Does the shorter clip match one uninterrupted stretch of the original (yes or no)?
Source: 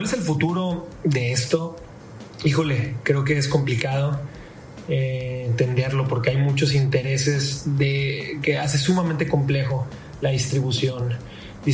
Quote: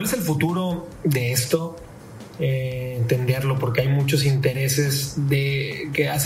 no